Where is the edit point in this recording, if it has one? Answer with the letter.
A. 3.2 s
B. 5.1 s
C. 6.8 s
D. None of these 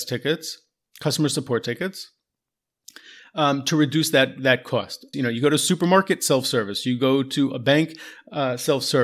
B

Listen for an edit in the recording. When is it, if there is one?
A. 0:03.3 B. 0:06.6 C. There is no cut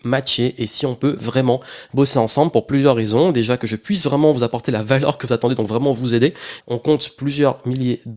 B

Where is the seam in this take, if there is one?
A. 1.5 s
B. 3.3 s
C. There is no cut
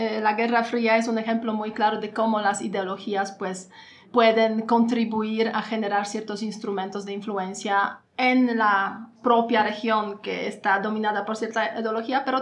C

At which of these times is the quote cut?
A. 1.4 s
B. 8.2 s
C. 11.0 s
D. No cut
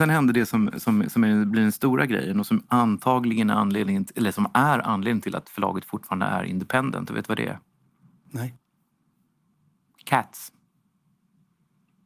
D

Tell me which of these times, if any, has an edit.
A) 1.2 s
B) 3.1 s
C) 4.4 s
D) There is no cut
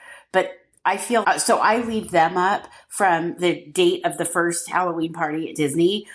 A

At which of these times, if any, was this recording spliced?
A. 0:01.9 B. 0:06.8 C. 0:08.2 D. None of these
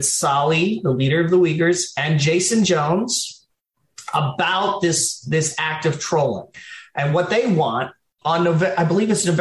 C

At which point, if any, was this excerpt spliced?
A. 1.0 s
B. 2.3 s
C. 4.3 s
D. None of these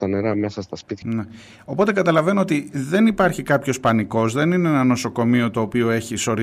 A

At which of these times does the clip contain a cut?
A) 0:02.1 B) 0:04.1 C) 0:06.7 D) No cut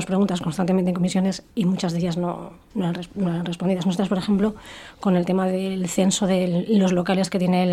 D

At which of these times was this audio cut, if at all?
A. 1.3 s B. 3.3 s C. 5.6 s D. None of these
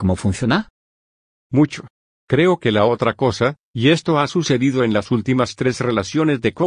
D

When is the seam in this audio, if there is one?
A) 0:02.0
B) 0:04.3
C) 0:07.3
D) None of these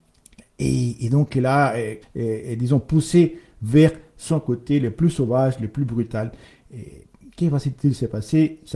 A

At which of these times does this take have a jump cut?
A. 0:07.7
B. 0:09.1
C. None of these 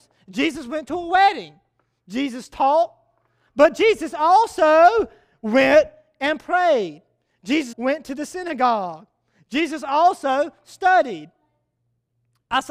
A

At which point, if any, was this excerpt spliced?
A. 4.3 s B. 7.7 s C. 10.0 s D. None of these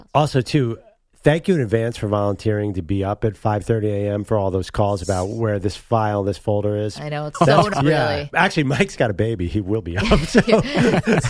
B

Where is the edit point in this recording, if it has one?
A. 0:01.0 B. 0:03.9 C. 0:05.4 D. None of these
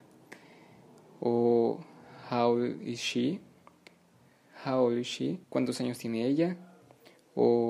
C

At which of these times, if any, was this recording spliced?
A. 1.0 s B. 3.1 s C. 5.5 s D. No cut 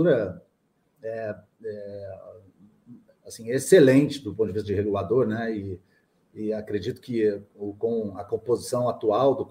D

